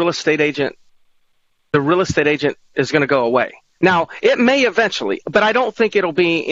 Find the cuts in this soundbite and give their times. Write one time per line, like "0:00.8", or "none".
0:03.8